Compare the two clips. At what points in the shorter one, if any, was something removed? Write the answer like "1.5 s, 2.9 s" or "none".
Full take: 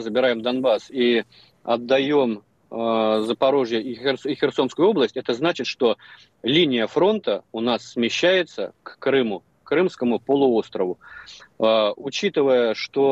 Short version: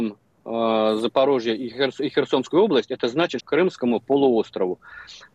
3.4 s